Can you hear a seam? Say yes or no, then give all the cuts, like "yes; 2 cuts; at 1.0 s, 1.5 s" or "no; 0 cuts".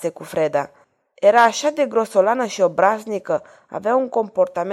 no; 0 cuts